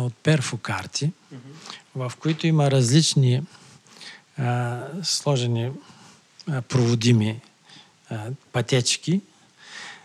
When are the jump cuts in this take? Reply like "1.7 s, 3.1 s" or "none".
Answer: none